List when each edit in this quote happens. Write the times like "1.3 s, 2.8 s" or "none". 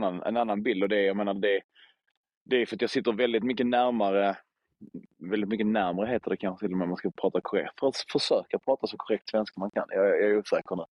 none